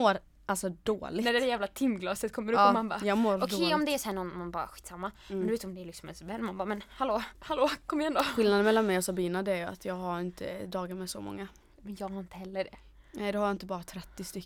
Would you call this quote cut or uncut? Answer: cut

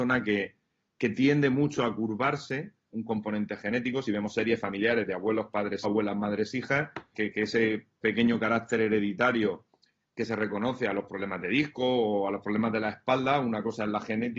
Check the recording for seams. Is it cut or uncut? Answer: cut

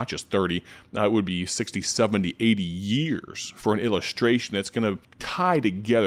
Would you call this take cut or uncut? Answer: cut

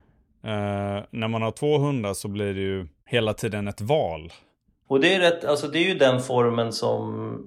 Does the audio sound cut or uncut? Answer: cut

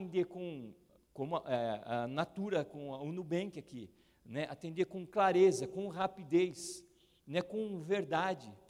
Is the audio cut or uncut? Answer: uncut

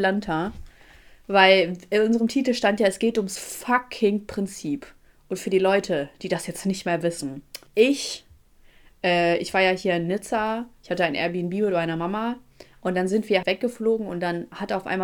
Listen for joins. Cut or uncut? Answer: cut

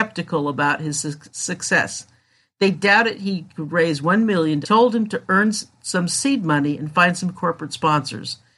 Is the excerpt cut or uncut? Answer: cut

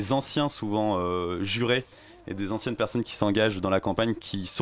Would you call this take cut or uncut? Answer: uncut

